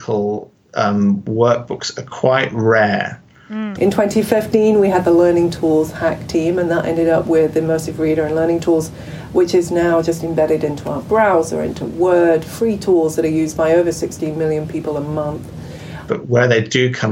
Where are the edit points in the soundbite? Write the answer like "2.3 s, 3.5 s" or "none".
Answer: 3.8 s, 16.1 s